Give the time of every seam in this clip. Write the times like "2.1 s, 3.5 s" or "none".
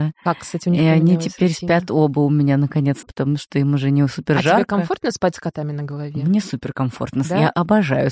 3.0 s